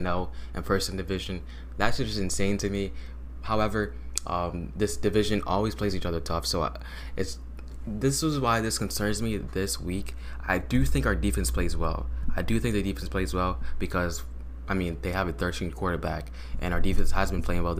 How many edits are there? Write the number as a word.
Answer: zero